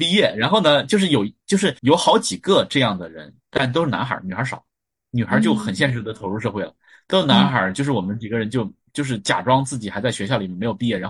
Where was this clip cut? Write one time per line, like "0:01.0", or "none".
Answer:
0:01.8